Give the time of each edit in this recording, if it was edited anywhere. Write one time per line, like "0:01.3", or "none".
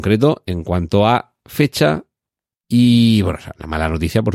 0:02.5